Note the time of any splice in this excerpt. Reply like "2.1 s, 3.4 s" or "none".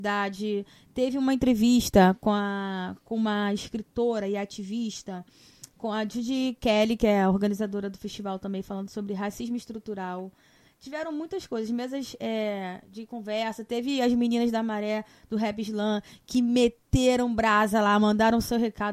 none